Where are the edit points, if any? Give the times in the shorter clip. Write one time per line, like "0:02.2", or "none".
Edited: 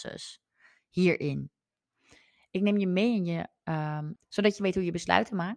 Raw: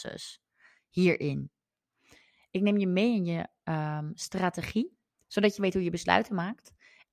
0:04.2

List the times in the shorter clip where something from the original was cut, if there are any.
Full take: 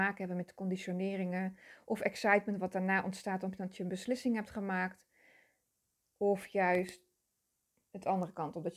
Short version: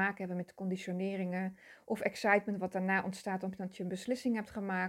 none

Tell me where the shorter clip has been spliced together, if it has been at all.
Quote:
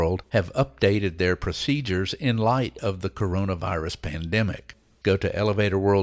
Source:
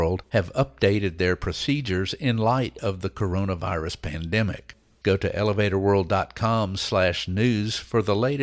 none

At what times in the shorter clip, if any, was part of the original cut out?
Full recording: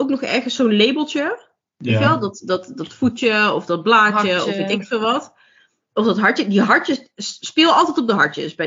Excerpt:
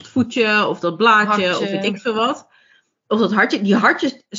none

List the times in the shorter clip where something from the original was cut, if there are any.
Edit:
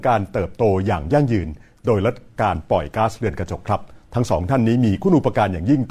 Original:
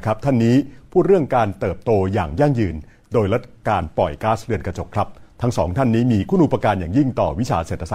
none

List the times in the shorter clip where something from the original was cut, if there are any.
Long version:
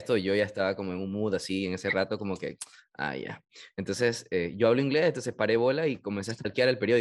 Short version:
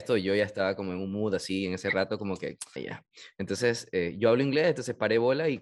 0:02.8

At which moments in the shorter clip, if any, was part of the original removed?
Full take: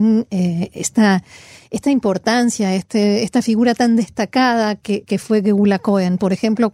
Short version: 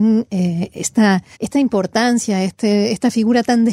0:01.3

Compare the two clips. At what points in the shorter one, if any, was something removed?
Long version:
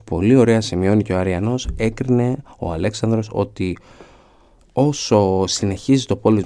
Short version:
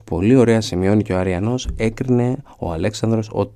none

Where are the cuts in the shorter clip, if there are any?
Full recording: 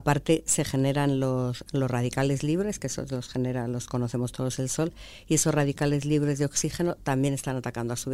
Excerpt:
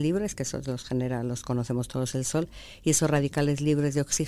none

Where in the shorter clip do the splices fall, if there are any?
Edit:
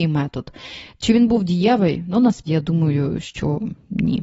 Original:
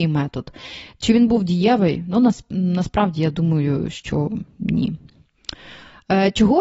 0:02.5

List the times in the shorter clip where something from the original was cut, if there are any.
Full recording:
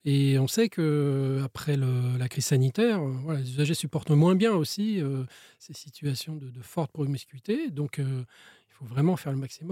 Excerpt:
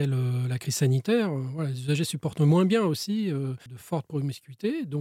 0:03.7

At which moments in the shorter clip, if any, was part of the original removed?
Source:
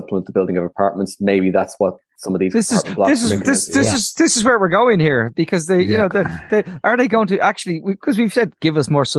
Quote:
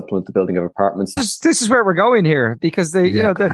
0:01.2

